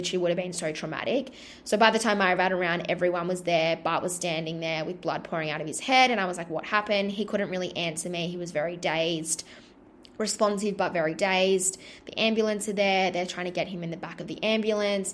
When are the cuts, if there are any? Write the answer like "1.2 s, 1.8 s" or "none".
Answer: none

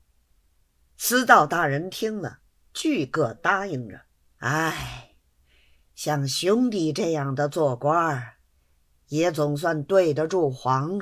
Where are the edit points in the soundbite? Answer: 4.3 s

